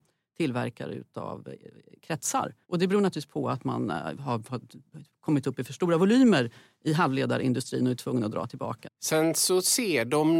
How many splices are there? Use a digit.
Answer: 2